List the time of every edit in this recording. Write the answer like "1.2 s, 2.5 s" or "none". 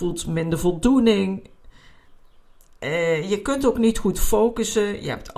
none